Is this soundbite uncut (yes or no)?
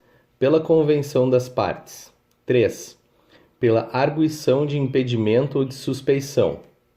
yes